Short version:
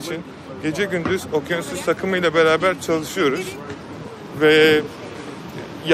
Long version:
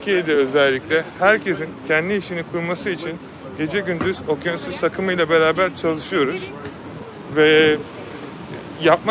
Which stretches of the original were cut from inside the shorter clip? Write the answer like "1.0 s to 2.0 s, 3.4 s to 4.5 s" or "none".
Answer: none

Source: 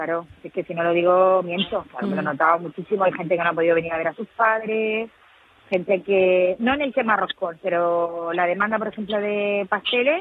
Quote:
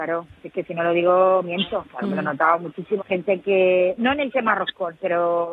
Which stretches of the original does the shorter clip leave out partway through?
3.0 s to 5.6 s

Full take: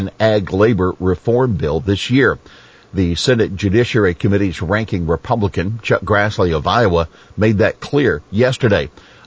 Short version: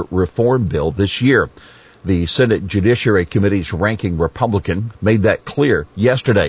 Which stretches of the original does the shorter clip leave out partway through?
5.8 s to 7.3 s

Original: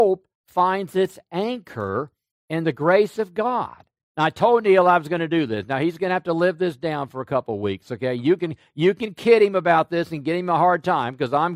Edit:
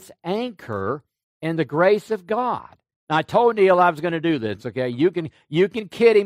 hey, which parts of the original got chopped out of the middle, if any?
5.7 s to 7.8 s

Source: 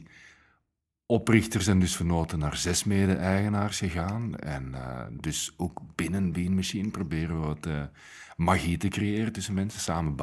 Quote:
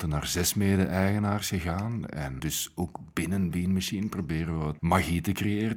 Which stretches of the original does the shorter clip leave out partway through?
4.7 s to 5.2 s, 7.6 s to 8.4 s

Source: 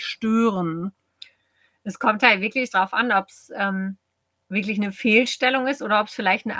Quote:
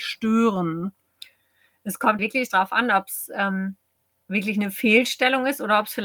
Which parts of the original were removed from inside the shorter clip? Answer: 2.2 s to 2.4 s

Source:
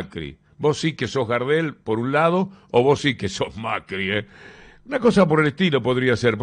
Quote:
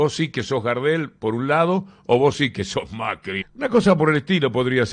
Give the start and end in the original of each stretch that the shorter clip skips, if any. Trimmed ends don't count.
4.0 s to 4.7 s

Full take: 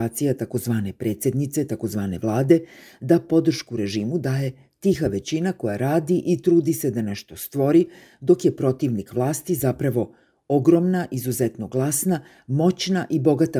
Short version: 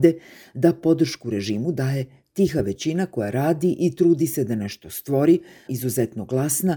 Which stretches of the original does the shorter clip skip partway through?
8.1 s to 11.1 s

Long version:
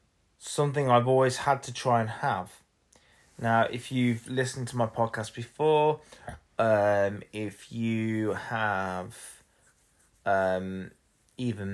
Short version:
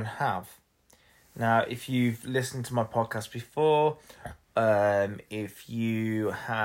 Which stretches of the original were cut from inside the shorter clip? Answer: none

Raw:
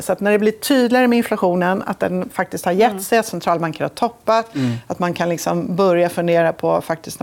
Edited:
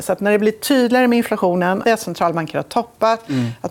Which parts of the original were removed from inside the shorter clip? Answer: 1.8 s to 3.1 s

